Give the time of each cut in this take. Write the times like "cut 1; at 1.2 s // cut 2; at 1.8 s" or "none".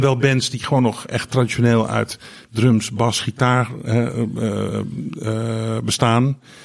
none